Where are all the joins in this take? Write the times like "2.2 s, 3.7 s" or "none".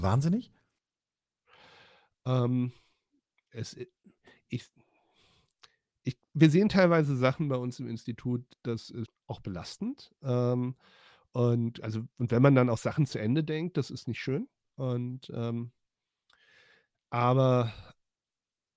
9.1 s